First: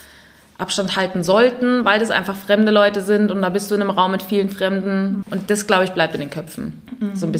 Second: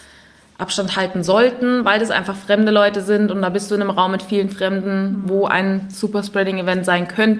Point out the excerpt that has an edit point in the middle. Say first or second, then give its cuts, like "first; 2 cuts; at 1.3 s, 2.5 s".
first; 1 cut; at 5.2 s